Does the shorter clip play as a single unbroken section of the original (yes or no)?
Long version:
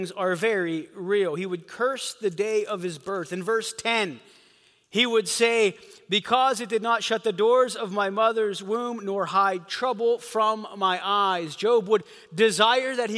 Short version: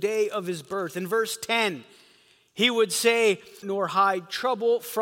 no